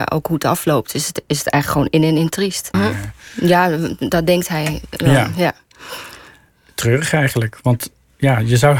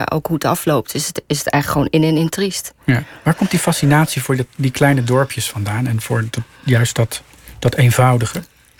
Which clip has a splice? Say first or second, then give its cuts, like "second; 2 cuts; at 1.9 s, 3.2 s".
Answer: first; 1 cut; at 2.7 s